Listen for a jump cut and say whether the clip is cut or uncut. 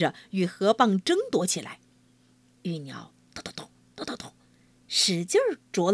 uncut